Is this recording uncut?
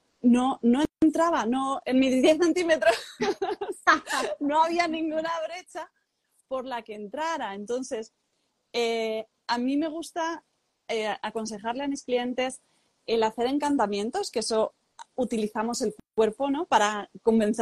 yes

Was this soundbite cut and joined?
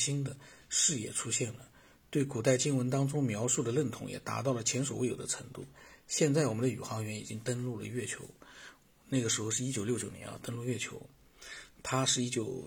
no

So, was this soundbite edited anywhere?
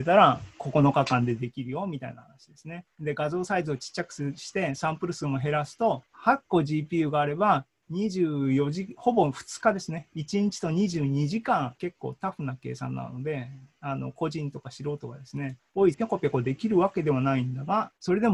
yes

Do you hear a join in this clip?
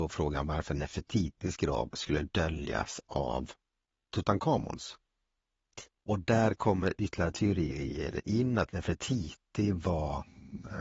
no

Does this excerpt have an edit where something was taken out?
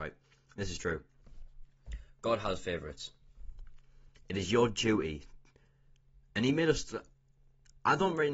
no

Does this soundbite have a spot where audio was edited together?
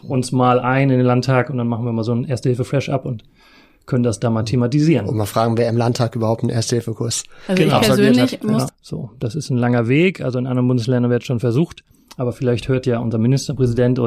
yes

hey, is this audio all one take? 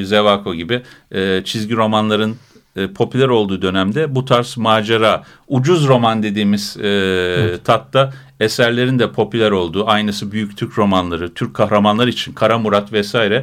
yes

